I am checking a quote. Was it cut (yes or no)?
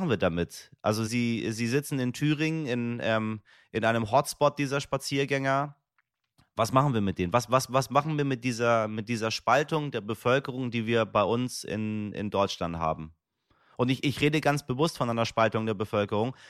yes